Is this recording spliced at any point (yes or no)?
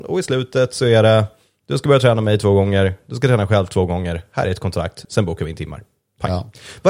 yes